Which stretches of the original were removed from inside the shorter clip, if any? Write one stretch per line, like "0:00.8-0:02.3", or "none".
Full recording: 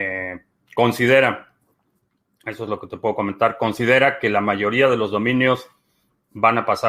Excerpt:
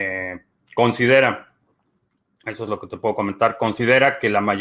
none